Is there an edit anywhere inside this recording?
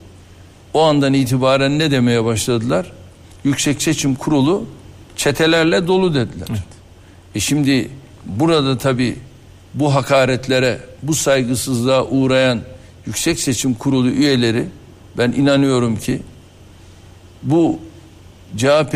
no; 0 cuts

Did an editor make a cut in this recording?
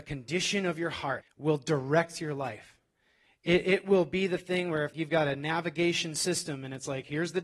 yes; 2 cuts; at 1.2 s, 4.9 s

